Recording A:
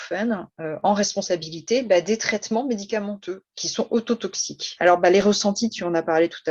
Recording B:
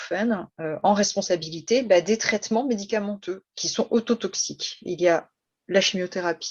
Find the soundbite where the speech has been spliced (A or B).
A